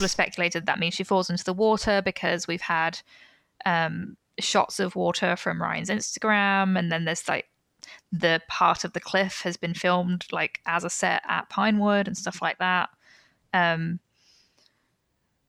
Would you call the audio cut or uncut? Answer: uncut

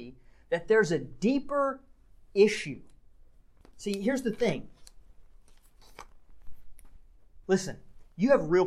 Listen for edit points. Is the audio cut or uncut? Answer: cut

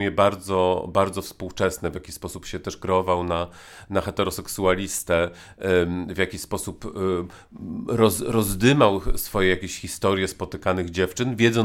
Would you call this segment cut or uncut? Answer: uncut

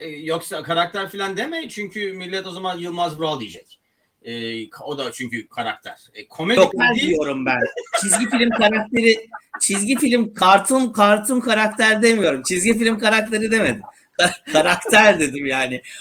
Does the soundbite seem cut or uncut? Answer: cut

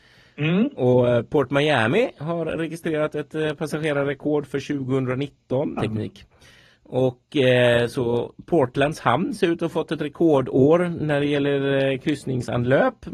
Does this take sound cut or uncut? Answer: cut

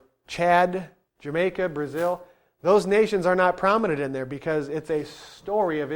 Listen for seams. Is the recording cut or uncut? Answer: cut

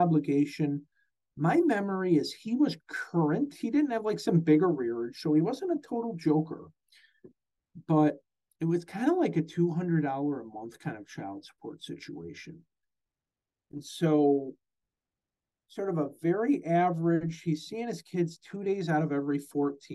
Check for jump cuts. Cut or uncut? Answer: uncut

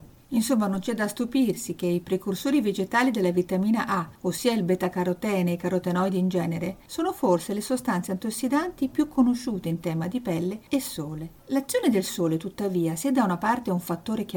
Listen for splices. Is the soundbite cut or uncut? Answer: uncut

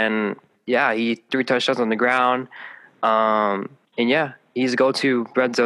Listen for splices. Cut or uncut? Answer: cut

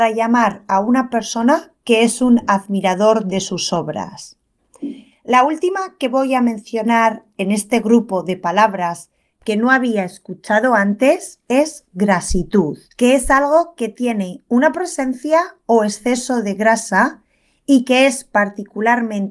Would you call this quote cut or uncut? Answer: cut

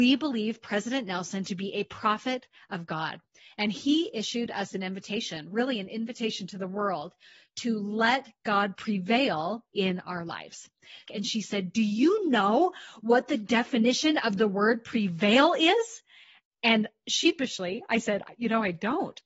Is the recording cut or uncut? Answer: cut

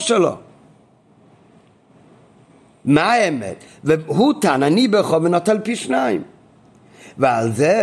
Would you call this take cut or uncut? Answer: uncut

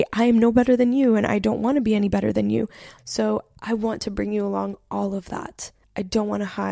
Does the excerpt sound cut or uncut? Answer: cut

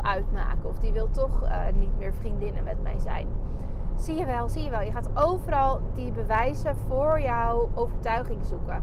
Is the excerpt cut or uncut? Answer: uncut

